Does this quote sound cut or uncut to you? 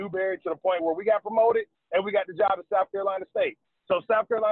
uncut